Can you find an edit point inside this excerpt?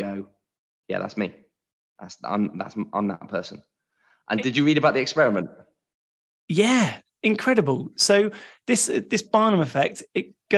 no; 0 cuts

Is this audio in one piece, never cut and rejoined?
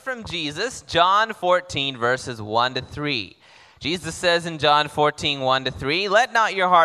yes; 0 cuts

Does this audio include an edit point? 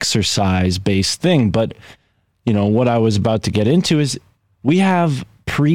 no; 0 cuts

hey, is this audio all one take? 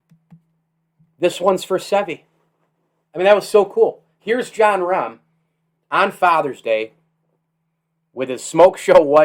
yes; 0 cuts

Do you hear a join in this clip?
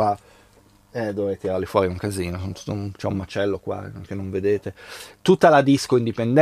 no; 0 cuts

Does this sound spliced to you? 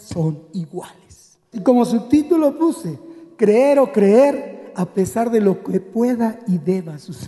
yes; 1 cut; at 1.5 s

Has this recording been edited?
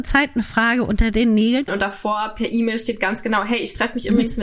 yes; 1 cut; at 1.7 s

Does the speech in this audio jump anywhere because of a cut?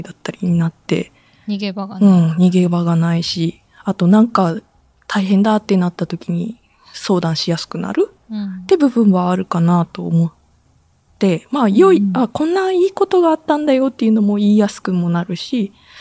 no; 0 cuts

